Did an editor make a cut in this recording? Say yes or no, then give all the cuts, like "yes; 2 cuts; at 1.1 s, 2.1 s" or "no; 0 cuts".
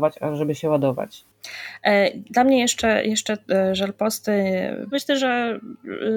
yes; 1 cut; at 4.9 s